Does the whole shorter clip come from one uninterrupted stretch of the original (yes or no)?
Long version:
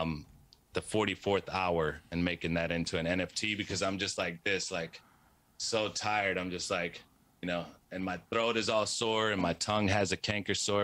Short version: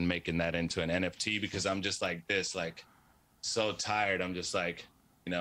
yes